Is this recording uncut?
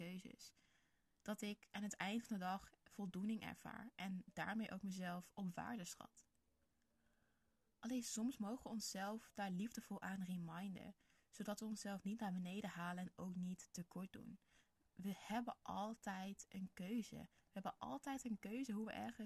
yes; 0 cuts

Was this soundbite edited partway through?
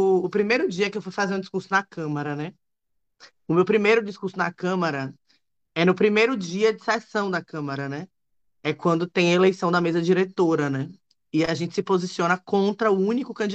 no; 0 cuts

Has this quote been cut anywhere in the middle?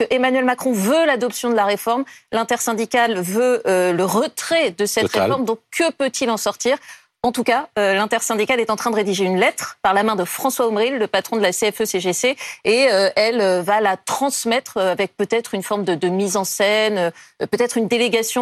no; 0 cuts

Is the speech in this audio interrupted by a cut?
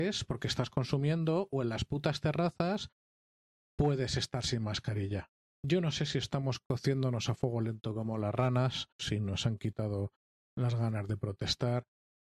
yes; 2 cuts; at 5.4 s, 9.0 s

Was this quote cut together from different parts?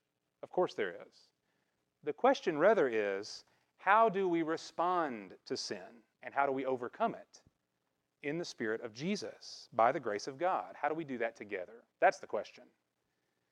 yes; 1 cut; at 6.1 s

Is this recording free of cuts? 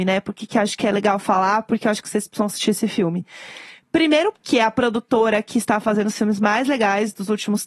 no; 1 cut; at 4.3 s

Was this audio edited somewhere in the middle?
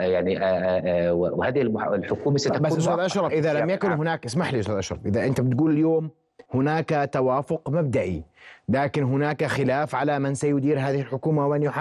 yes; 2 cuts; at 3.3 s, 6.5 s

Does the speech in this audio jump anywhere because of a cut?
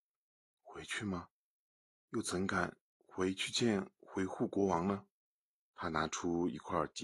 yes; 1 cut; at 5.6 s

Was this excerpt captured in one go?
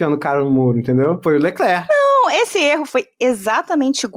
yes; 0 cuts

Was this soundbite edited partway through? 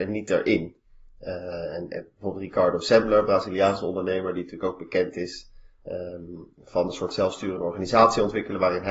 no; 0 cuts

